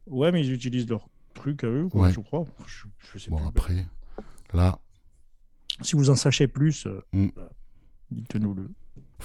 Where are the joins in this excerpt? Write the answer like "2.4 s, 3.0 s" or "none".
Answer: none